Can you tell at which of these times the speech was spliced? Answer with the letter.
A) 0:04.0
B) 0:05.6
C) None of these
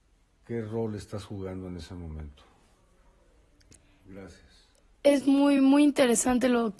C